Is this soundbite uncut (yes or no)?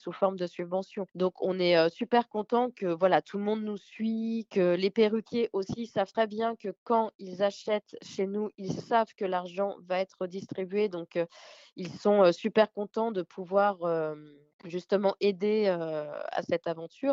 yes